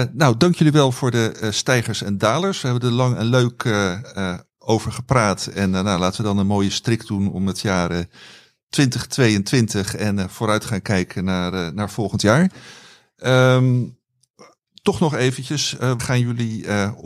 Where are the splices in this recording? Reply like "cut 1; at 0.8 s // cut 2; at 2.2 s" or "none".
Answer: cut 1; at 16.0 s